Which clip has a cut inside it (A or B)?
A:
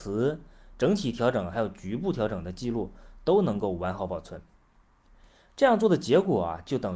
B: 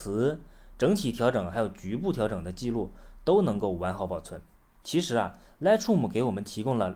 B